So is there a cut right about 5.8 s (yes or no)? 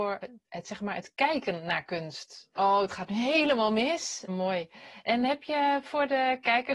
no